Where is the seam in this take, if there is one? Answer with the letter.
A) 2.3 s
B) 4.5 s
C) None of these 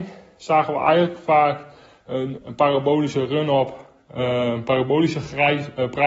A